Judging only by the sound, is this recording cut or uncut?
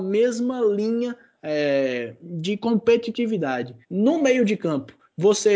cut